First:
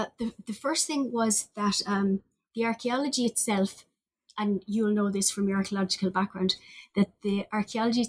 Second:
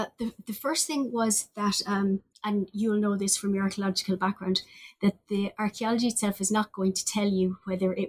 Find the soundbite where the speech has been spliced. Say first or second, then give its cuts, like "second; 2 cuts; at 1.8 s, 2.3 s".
second; 1 cut; at 2.3 s